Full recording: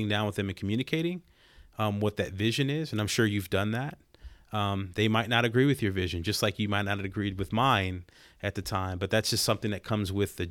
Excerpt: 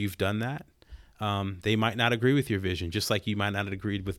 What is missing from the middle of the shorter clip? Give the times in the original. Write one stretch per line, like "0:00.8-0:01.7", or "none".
none